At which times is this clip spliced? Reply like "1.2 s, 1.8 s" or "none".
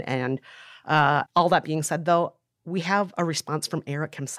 1.3 s